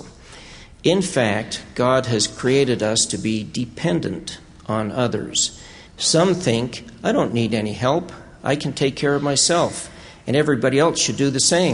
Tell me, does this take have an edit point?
yes; 1 cut; at 5.9 s

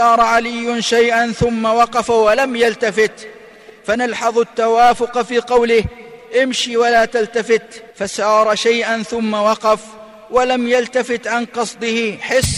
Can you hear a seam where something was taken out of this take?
yes; 1 cut; at 7.9 s

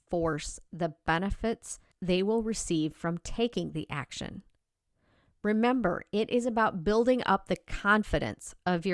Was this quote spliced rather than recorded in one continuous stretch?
no; 0 cuts

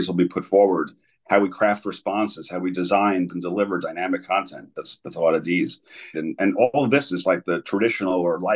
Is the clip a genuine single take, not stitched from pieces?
no; 3 cuts; at 3.3 s, 6.1 s, 7.2 s

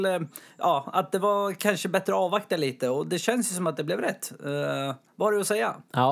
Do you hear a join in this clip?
no; 0 cuts

